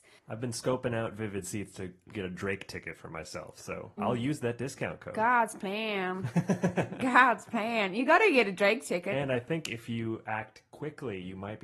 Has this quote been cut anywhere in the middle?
yes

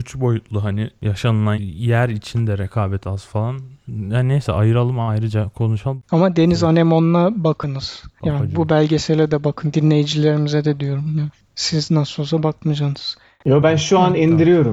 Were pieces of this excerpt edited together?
yes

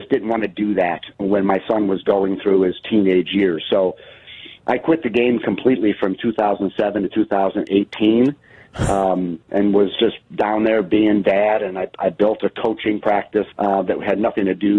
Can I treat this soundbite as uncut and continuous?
no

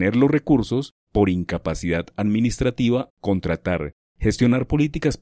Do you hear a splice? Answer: yes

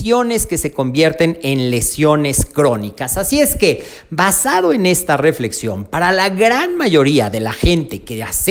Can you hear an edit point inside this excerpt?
no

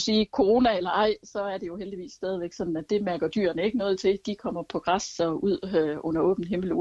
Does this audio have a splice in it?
yes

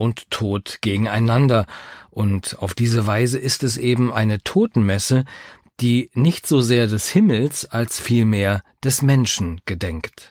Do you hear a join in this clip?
no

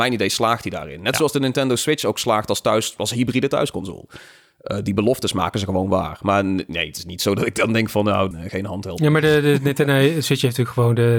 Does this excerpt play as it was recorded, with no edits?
no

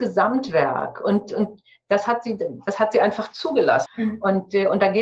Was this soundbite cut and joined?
yes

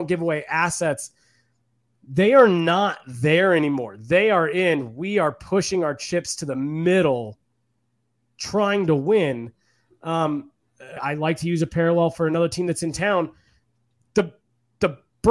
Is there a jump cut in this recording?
yes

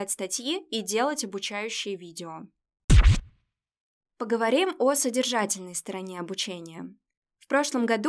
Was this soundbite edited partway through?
no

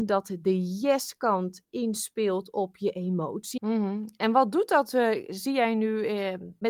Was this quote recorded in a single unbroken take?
no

